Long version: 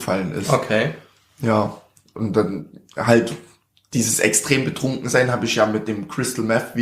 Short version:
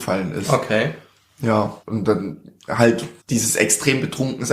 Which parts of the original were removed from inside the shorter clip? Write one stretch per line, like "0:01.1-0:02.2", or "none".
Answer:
0:01.8-0:02.1
0:03.5-0:03.8